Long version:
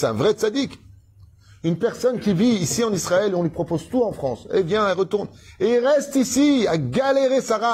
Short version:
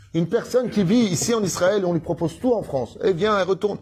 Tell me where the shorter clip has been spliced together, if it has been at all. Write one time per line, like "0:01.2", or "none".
none